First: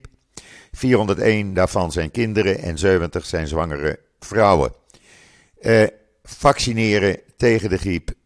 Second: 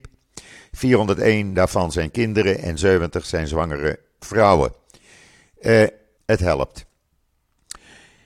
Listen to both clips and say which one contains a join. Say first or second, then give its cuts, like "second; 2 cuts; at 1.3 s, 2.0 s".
second; 1 cut; at 6.2 s